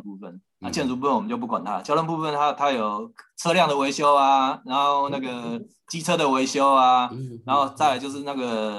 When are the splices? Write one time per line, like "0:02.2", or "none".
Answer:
none